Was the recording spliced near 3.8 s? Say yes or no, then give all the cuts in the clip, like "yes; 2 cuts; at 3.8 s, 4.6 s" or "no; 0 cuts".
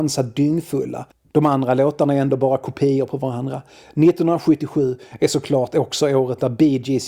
no; 1 cut; at 1.3 s